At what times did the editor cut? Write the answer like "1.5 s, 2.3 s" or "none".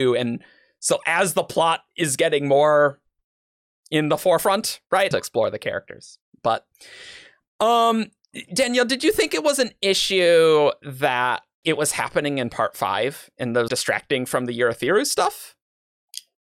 5.1 s, 11.6 s, 13.7 s